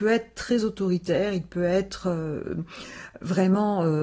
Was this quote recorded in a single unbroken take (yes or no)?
yes